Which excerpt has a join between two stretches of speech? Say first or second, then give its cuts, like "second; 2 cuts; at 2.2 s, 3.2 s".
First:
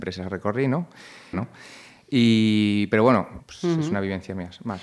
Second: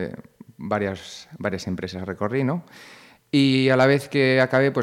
first; 2 cuts; at 1.3 s, 3.4 s